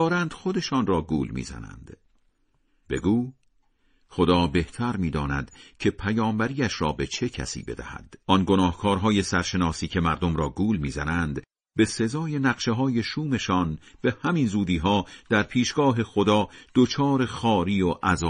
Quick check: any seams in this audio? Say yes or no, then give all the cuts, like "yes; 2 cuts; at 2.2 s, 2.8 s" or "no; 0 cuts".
yes; 2 cuts; at 2.8 s, 8.2 s